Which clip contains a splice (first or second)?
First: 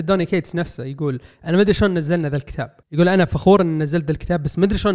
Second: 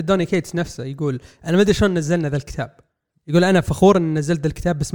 first